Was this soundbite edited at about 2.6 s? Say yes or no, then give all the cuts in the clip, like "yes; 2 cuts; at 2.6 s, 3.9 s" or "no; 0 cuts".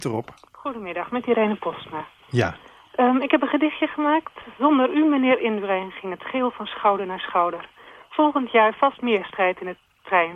no; 0 cuts